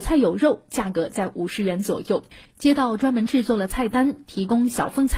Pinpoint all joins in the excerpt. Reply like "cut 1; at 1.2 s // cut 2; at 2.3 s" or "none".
cut 1; at 2.5 s